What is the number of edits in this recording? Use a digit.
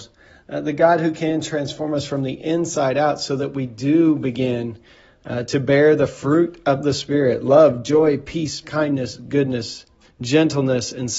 2